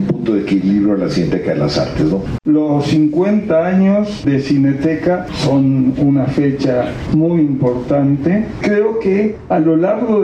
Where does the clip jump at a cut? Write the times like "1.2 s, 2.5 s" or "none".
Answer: 2.4 s